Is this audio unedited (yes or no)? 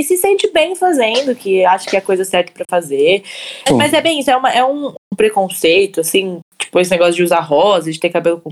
no